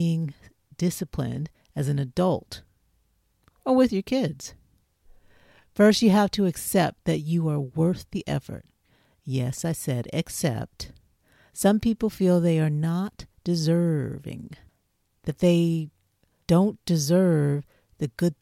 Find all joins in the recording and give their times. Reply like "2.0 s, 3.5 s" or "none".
none

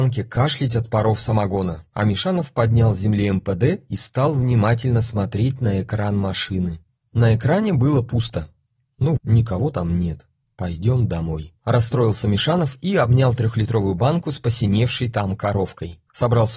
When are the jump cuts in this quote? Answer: 9.2 s

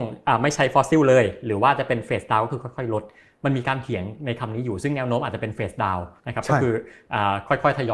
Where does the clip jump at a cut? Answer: 6.2 s

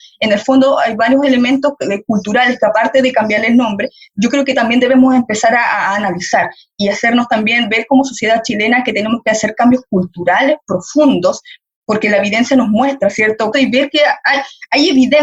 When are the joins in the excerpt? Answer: 13.5 s

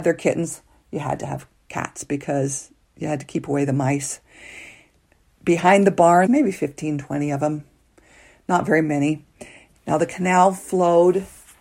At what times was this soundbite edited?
6.3 s, 9.7 s

